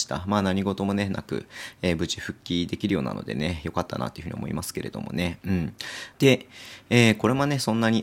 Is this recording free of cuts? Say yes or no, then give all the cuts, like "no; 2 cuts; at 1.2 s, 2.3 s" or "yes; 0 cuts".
no; 1 cut; at 6.1 s